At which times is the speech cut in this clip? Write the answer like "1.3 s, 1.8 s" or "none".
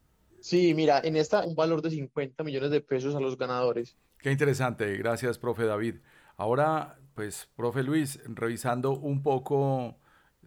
1.4 s, 4.1 s